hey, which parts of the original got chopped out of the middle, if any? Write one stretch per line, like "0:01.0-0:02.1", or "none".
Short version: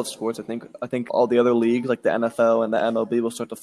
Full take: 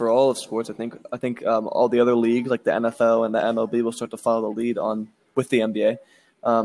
0:01.4-0:01.7